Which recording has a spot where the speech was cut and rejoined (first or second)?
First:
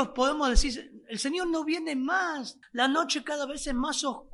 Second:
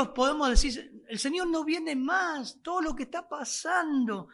first